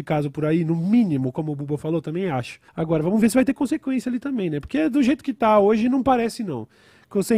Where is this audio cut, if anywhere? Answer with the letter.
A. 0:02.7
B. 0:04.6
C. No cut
A